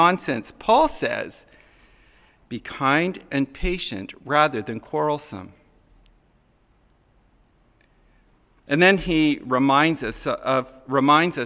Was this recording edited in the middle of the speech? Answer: no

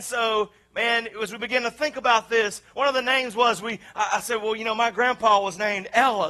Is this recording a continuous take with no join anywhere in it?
yes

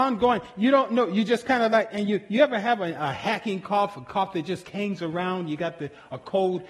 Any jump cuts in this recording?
no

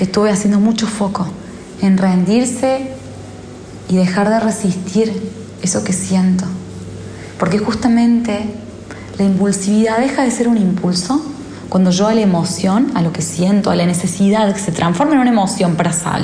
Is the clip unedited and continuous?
no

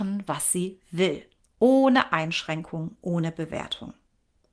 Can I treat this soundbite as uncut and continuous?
yes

